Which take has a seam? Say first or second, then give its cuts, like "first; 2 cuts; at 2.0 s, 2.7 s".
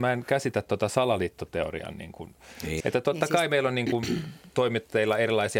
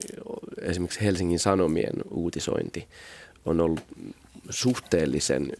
first; 1 cut; at 2.8 s